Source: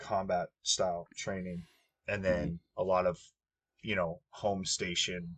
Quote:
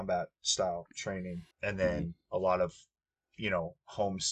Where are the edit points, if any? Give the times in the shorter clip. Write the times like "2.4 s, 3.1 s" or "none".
1.5 s